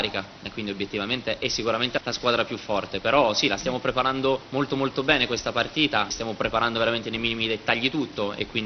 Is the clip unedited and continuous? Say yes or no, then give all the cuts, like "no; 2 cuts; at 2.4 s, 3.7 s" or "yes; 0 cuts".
no; 1 cut; at 6.1 s